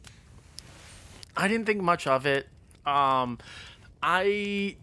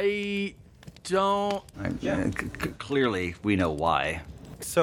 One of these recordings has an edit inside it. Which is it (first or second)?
second